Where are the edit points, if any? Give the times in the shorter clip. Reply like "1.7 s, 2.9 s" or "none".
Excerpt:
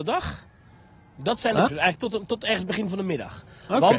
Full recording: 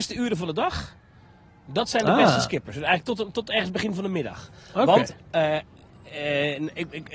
1.7 s